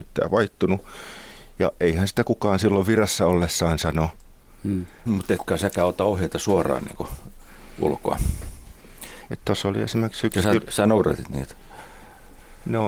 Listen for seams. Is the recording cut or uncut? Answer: cut